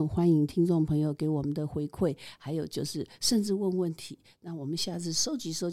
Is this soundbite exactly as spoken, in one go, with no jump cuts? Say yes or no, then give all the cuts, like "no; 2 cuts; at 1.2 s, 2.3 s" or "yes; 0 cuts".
yes; 0 cuts